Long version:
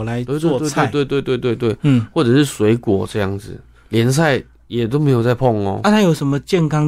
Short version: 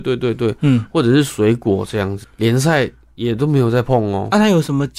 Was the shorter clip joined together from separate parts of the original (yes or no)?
yes